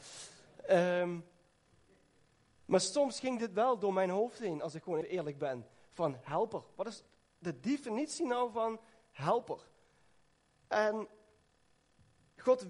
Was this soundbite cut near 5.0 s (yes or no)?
yes